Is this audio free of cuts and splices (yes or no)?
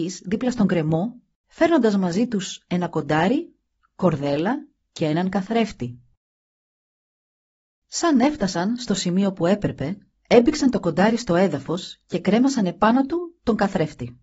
yes